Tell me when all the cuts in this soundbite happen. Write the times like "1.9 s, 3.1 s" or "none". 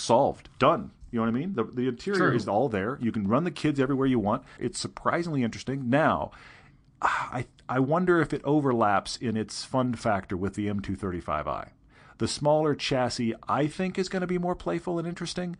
4.6 s